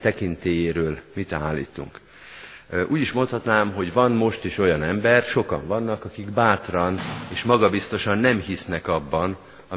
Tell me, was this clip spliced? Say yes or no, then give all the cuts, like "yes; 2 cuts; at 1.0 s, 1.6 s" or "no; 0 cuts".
no; 0 cuts